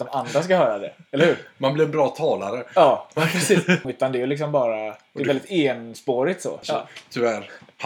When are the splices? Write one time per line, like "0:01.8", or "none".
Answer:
0:03.8
0:06.6